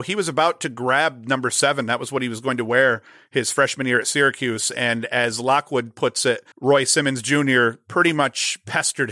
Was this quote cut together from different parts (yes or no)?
yes